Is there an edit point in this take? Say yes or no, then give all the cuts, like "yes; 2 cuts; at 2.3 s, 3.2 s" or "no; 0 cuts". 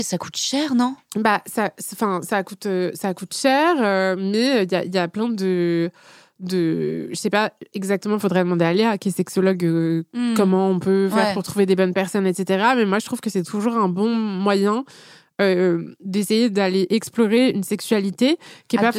no; 0 cuts